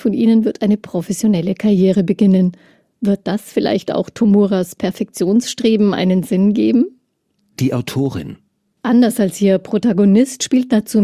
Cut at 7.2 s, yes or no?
no